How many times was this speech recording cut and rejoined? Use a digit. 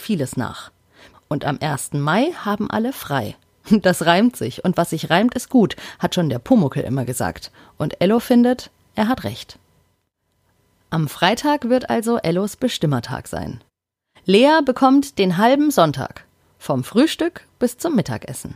1